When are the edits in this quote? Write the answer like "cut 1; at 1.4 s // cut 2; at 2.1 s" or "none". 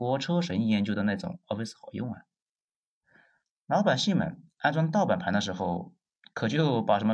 none